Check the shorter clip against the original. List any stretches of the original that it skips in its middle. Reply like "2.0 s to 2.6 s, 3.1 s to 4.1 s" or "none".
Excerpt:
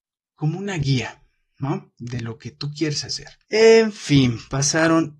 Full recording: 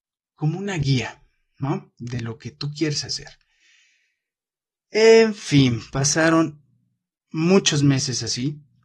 3.5 s to 4.9 s

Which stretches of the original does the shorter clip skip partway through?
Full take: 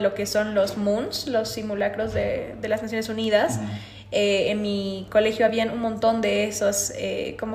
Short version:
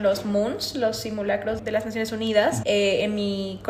2.1 s to 2.6 s, 3.6 s to 4.1 s

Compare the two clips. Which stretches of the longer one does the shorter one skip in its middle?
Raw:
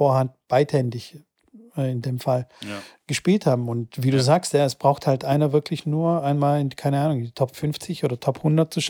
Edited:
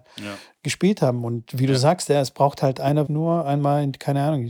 5.5 s to 5.8 s

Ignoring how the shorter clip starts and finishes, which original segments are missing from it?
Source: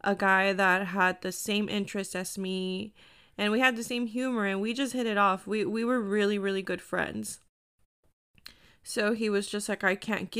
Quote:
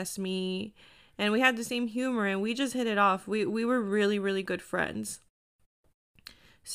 none

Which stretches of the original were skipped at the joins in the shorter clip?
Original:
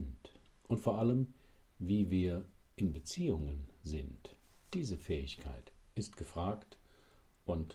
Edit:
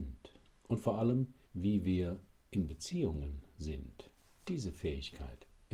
1.4 s to 1.7 s

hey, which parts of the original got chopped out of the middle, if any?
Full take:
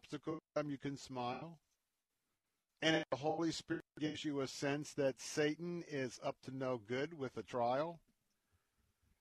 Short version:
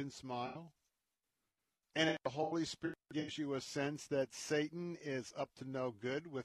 none

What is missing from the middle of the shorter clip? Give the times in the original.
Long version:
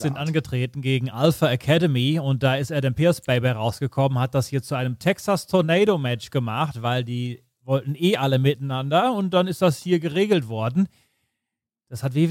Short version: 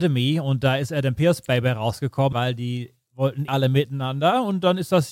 4.1 s to 6.8 s, 8.0 s to 8.2 s

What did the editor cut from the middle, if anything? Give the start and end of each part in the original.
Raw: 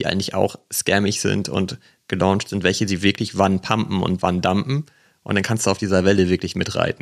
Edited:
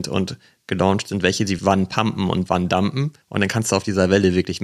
3.0 s to 3.3 s, 4.9 s to 5.2 s

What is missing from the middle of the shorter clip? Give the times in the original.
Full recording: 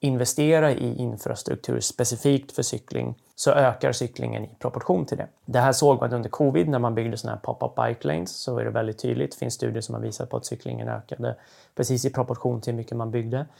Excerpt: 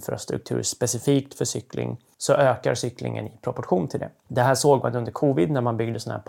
none

